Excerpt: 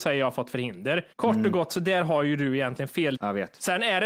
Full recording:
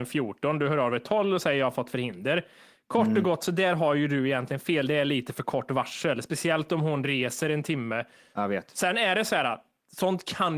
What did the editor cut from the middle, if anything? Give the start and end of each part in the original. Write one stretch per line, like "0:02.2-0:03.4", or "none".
0:02.5-0:02.8
0:04.9-0:08.3